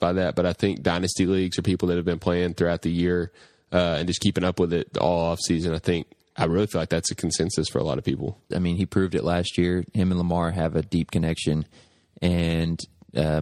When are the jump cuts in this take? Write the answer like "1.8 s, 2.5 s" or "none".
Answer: 8.5 s